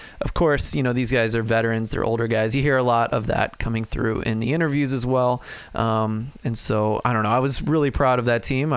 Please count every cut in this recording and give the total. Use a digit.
0